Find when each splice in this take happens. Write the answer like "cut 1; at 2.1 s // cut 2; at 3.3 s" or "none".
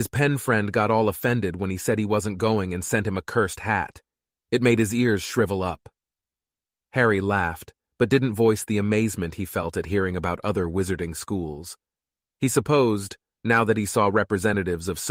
none